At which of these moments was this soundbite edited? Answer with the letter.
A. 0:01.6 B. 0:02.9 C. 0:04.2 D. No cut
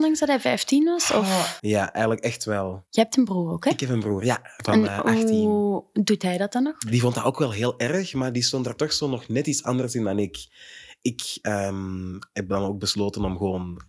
A